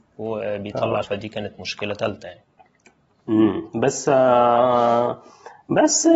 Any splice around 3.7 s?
no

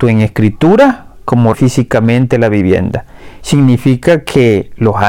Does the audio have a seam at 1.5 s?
yes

